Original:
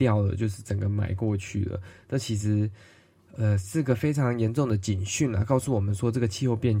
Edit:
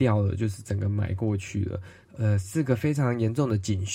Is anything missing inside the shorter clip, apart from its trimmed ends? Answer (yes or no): yes